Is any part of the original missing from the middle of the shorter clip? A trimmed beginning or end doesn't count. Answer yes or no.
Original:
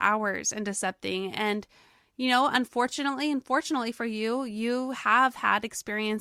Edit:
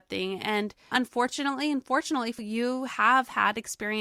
yes